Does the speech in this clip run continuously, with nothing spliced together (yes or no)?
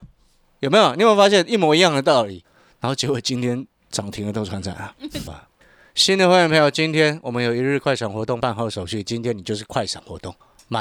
no